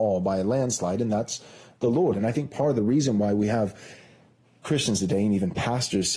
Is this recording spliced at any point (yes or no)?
yes